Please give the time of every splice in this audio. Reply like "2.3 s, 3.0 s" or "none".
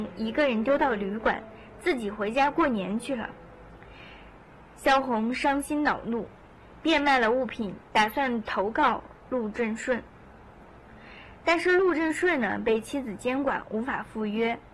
7.8 s